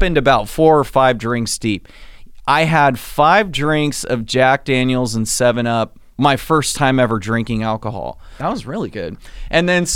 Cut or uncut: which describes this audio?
cut